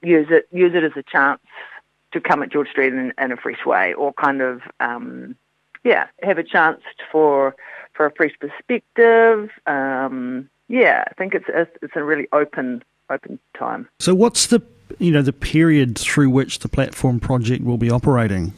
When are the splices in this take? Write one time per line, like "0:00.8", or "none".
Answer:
0:06.2